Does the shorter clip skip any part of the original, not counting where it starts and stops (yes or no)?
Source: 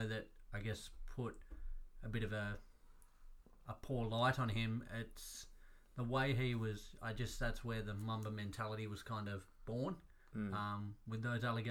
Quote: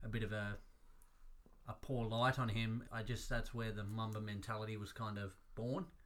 yes